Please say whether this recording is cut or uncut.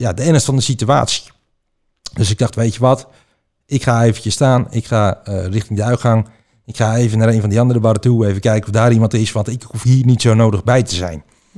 uncut